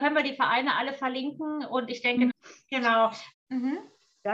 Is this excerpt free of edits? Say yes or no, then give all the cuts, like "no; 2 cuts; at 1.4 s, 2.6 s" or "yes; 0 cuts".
no; 2 cuts; at 2.3 s, 3.3 s